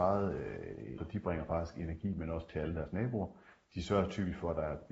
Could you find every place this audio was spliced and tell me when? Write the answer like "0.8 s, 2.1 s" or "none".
1.0 s